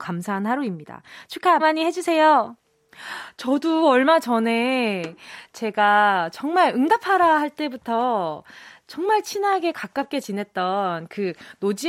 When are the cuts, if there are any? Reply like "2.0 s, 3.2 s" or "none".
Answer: 1.6 s

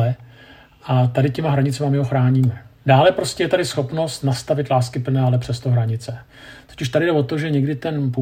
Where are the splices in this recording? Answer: 2.8 s

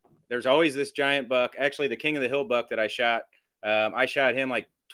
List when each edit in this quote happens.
none

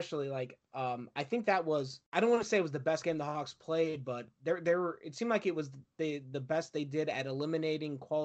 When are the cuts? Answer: 2.1 s

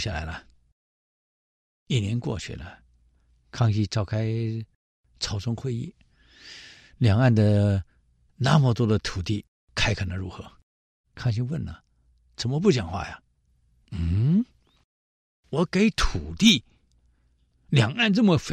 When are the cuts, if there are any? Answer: 11.0 s, 13.5 s

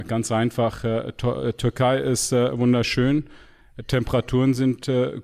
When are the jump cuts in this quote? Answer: none

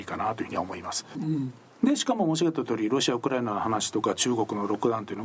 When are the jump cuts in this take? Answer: 1.2 s

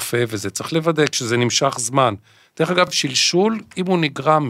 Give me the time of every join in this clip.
none

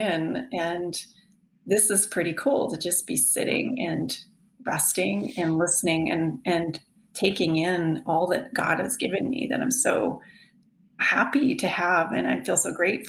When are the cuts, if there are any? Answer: none

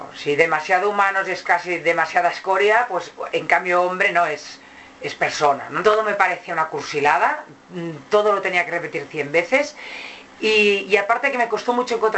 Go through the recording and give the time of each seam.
5.8 s

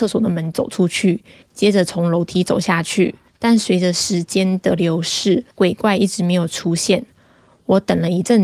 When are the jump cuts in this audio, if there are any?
1.4 s, 3.3 s, 5.5 s

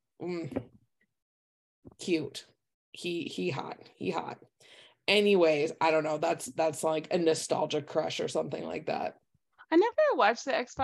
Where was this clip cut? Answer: none

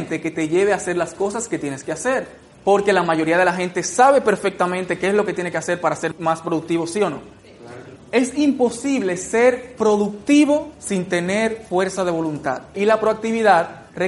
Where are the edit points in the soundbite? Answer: 8.0 s, 12.7 s

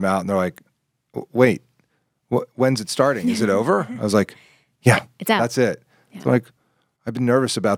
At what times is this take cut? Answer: none

